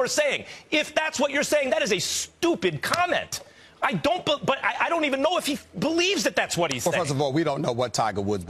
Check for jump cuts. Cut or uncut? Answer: uncut